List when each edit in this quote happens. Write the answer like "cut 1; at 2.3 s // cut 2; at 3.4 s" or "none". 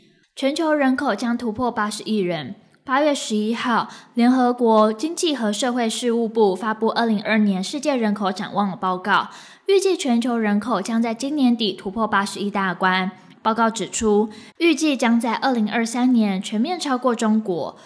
cut 1; at 7.2 s // cut 2; at 13.3 s // cut 3; at 14.5 s